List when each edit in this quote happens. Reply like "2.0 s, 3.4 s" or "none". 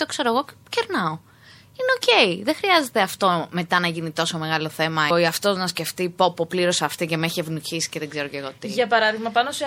5.1 s